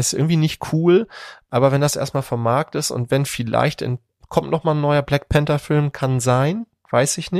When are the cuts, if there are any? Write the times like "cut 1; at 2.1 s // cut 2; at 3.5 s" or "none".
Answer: none